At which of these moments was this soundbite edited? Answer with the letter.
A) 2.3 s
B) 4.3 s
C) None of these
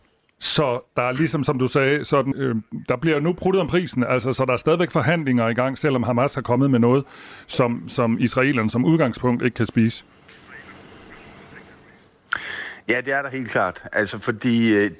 A